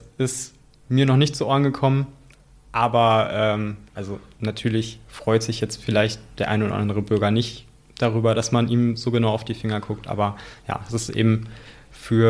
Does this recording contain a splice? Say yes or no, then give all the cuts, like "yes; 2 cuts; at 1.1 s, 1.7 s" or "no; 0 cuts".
no; 0 cuts